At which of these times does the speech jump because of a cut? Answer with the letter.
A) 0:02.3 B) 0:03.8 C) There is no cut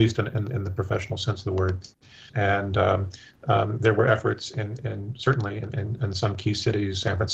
A